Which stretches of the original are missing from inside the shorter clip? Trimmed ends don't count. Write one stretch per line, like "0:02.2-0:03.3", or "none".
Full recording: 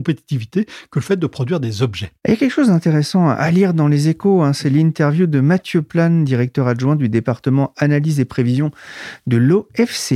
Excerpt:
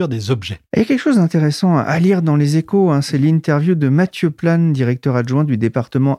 none